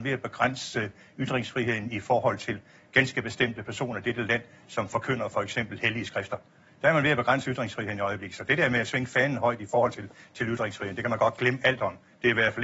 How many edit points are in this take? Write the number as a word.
zero